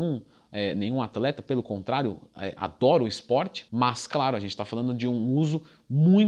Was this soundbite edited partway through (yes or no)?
no